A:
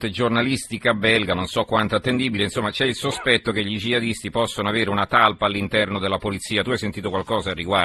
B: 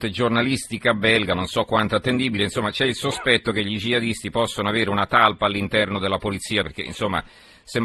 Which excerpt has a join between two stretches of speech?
B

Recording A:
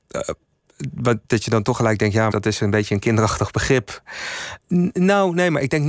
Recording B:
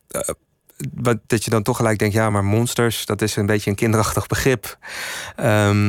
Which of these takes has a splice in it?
A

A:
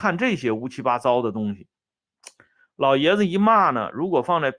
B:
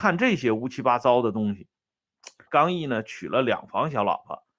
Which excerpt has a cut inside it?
B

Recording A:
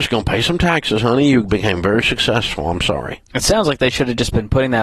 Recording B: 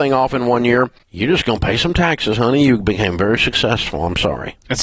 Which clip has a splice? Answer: B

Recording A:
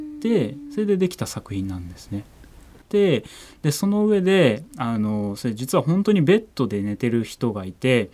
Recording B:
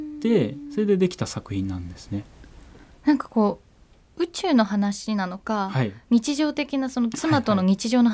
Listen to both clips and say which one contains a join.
A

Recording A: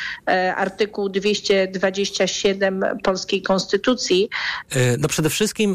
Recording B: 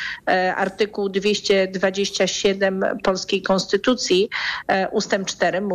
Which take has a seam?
A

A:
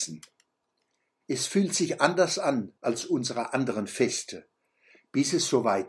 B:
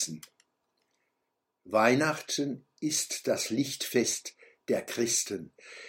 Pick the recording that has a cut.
A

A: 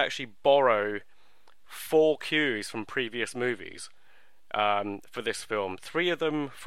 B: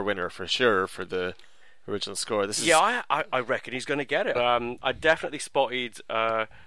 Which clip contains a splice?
B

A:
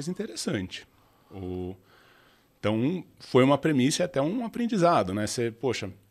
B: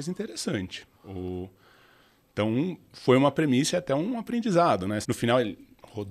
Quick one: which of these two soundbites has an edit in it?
B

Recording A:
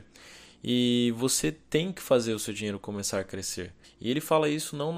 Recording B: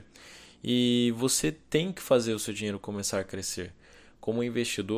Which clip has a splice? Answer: A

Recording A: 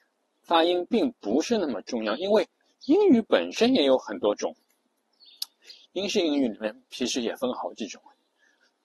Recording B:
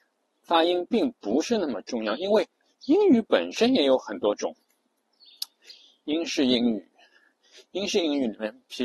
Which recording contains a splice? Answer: A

